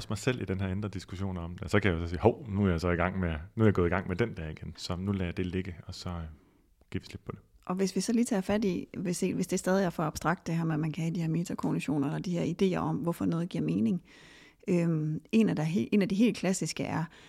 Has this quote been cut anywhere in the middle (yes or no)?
yes